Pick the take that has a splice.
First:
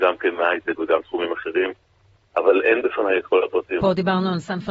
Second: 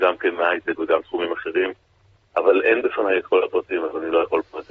first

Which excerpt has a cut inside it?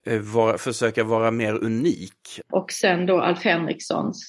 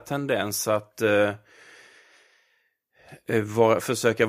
first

